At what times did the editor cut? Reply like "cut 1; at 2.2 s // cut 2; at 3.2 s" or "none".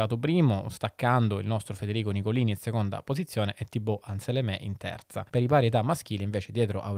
cut 1; at 5.3 s

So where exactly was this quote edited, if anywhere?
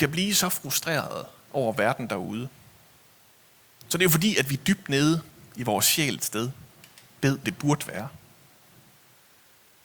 cut 1; at 7.4 s

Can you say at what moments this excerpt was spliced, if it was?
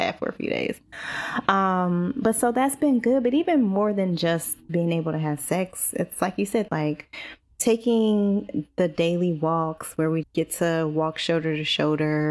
cut 1; at 6.7 s // cut 2; at 10.2 s

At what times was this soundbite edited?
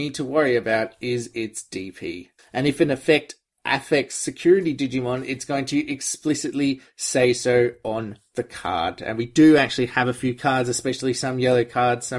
none

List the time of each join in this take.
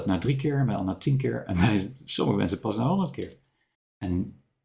cut 1; at 3.7 s

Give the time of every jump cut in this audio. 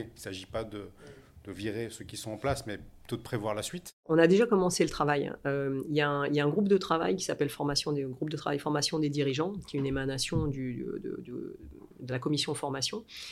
none

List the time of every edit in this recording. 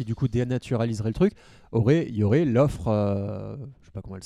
none

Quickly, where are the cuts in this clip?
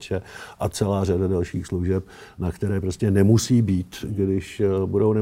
none

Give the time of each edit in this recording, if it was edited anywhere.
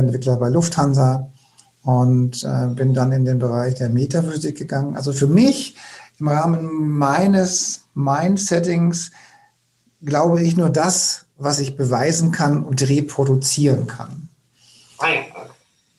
none

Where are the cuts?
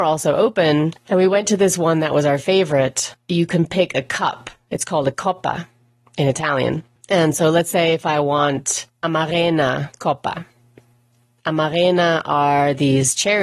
none

